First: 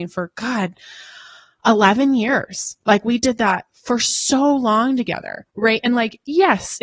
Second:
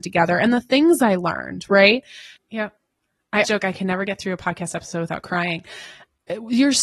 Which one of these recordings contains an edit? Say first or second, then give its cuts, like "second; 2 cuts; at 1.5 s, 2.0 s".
second; 2 cuts; at 2.4 s, 3.4 s